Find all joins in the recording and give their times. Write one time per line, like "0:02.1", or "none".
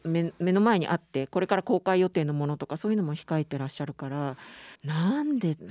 0:04.7